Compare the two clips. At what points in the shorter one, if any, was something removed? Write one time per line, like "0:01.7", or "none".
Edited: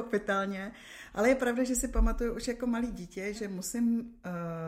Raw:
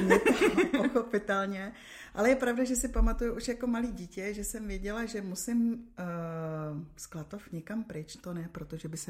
0:03.3